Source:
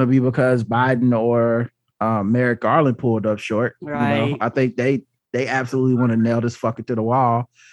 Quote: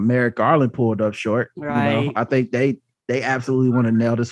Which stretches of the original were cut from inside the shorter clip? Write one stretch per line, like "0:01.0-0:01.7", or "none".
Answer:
none